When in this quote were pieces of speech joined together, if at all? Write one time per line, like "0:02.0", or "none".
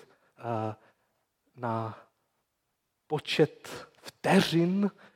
none